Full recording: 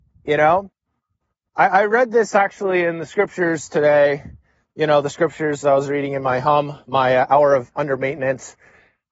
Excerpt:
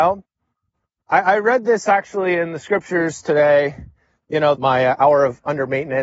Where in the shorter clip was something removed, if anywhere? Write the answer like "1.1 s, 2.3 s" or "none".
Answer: 4.5 s